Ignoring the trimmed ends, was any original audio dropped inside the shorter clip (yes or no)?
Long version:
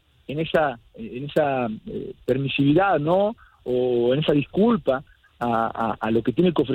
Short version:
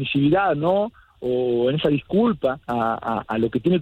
yes